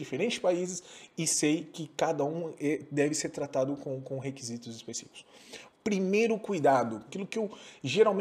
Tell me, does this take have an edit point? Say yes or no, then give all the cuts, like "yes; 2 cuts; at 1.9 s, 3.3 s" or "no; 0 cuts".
yes; 2 cuts; at 5.7 s, 7.1 s